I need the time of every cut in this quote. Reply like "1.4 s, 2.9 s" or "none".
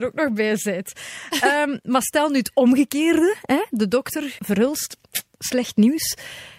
4.4 s